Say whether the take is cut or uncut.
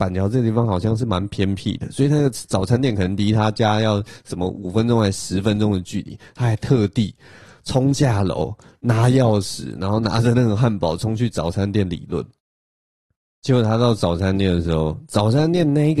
uncut